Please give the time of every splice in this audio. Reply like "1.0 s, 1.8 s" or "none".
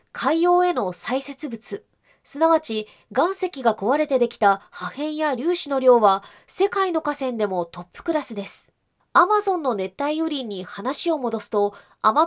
9.0 s